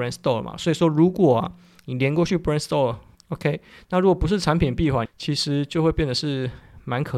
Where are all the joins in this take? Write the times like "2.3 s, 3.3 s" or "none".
3.1 s, 5.1 s